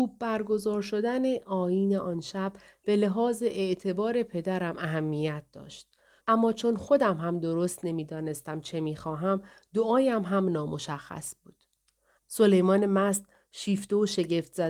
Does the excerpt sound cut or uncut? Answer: cut